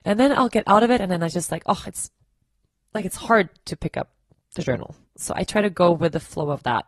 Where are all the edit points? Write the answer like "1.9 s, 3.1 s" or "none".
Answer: 5.2 s